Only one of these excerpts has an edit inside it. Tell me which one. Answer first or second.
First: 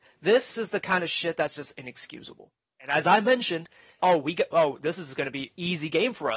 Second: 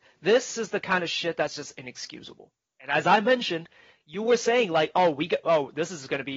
first